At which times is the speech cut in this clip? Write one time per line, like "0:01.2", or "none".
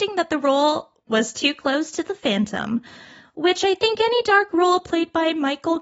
0:01.1